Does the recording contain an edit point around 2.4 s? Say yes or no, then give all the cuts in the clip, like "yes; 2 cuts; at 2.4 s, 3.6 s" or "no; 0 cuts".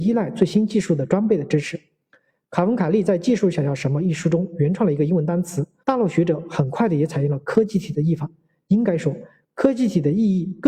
no; 1 cut; at 5.8 s